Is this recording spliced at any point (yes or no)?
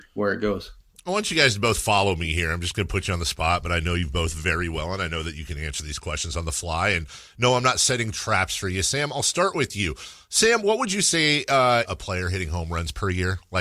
yes